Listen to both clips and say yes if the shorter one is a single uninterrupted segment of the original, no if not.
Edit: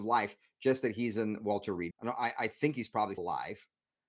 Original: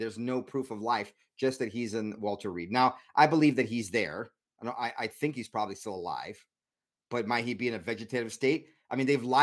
no